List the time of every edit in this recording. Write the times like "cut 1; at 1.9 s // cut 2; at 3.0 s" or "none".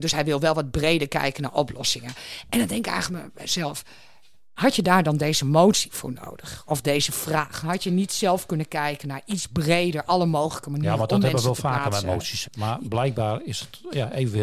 cut 1; at 12.4 s